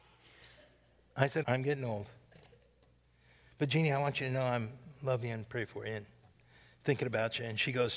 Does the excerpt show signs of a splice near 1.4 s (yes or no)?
yes